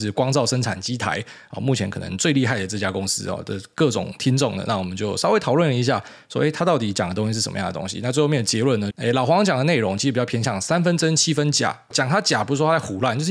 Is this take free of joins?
no; 2 cuts; at 8.9 s, 11.9 s

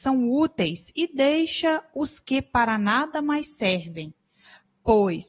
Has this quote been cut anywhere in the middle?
no; 0 cuts

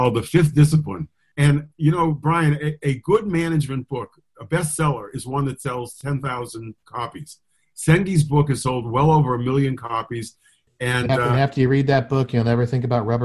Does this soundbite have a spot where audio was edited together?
no; 0 cuts

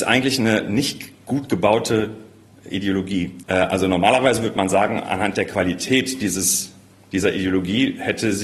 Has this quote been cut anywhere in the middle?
yes; 1 cut; at 3.4 s

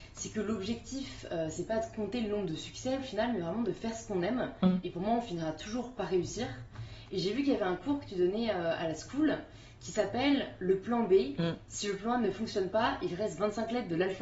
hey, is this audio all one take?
yes; 0 cuts

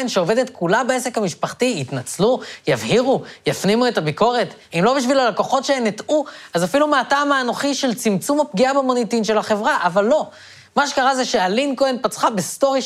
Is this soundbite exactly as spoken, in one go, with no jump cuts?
yes; 0 cuts

